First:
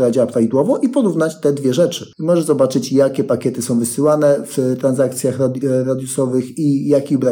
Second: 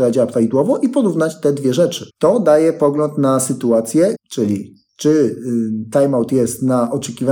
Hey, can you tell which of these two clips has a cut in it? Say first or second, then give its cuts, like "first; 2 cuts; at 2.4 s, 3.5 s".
second; 2 cuts; at 2.1 s, 4.1 s